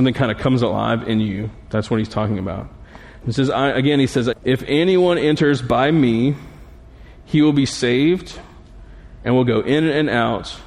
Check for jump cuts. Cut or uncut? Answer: cut